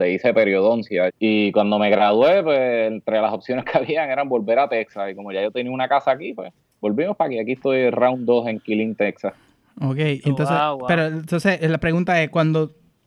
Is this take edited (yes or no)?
yes